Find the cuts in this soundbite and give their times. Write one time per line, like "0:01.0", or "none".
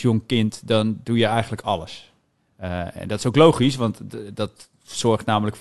none